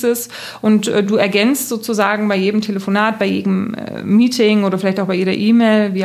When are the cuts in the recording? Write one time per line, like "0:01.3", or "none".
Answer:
none

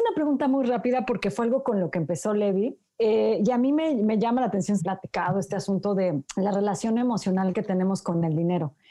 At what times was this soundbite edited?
0:02.9
0:04.8
0:06.3

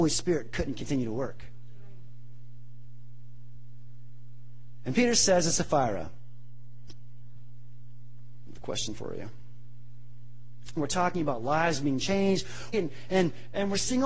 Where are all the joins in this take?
0:10.8
0:12.7

